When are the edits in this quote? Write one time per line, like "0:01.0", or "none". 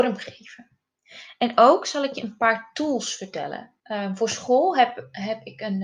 0:03.8

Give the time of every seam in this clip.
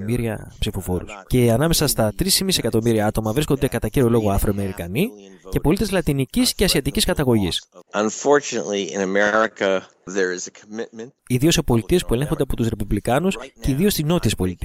0:01.3
0:07.8
0:11.2

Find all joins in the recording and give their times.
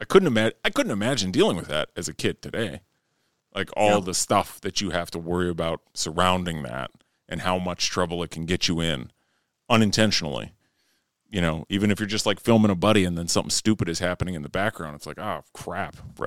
none

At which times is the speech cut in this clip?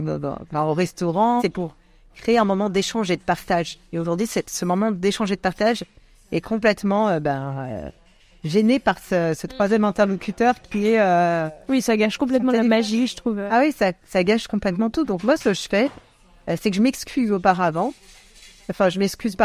0:01.4

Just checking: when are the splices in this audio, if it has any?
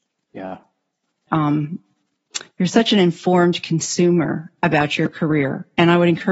0:01.3

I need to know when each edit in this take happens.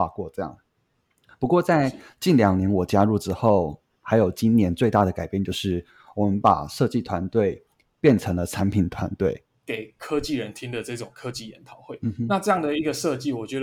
0:09.5

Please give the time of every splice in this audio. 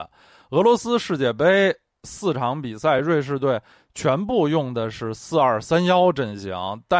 none

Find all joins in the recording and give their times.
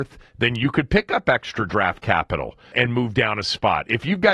0:02.7

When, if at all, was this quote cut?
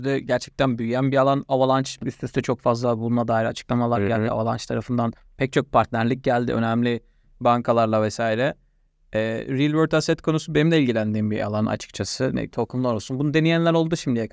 0:12.5

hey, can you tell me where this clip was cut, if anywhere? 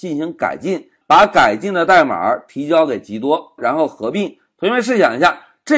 0:01.0
0:03.6

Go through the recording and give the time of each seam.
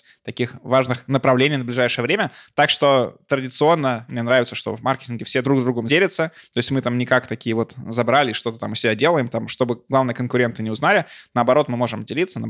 0:04.1

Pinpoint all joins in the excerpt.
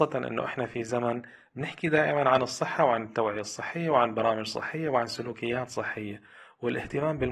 none

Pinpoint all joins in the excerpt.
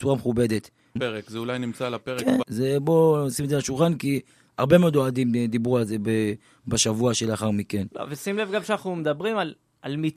0:01.0
0:02.4

